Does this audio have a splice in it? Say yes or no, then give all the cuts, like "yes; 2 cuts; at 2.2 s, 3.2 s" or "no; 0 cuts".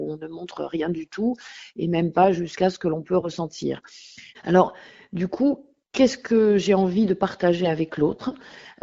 yes; 1 cut; at 4.3 s